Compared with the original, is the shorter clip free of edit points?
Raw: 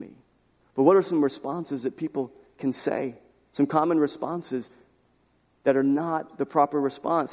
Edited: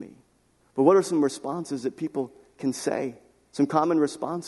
yes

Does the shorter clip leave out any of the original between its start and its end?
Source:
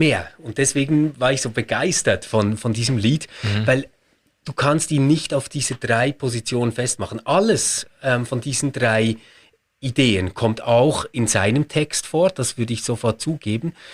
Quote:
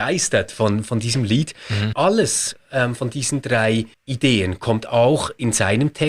yes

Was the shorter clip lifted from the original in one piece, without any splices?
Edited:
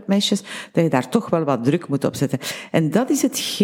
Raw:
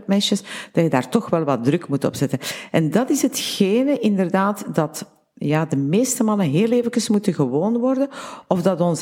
yes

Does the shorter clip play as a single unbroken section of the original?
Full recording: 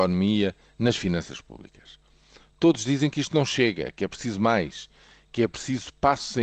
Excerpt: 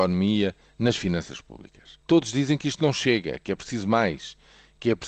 no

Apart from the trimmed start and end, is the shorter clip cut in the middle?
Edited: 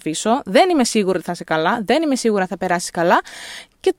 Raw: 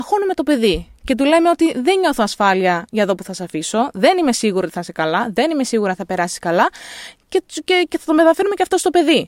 no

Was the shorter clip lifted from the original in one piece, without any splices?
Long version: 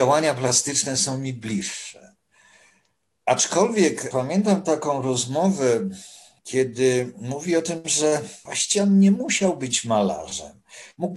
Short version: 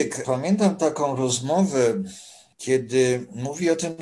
yes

